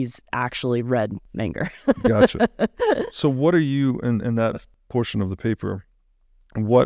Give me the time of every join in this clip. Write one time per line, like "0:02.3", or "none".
none